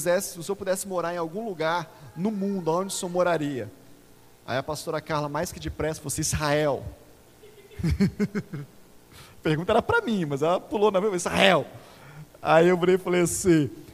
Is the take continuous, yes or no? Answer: yes